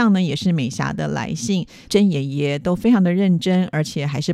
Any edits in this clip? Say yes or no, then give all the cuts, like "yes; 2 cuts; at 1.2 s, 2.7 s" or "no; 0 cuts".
yes; 1 cut; at 1.9 s